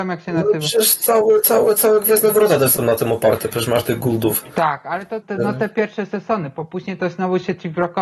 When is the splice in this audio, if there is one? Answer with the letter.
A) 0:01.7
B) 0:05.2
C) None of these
B